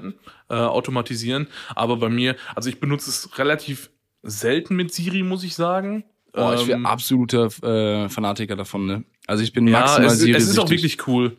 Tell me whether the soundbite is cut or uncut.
uncut